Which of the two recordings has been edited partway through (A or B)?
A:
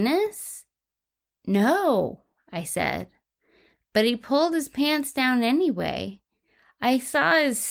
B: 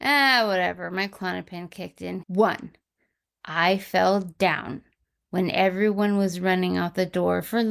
B